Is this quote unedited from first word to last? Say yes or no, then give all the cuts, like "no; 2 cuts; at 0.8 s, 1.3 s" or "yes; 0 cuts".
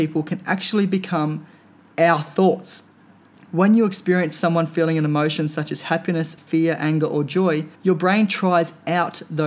no; 2 cuts; at 6.4 s, 7.7 s